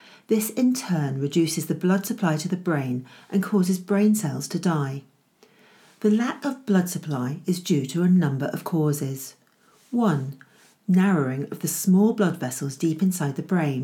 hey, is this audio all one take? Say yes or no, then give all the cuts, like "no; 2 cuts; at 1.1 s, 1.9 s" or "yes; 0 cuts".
yes; 0 cuts